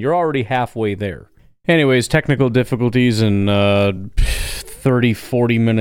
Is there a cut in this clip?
no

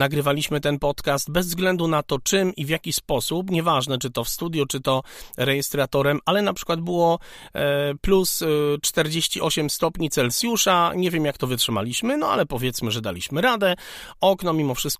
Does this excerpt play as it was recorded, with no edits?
yes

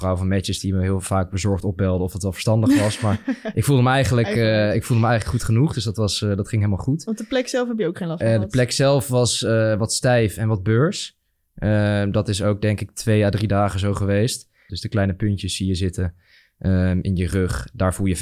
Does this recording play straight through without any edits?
no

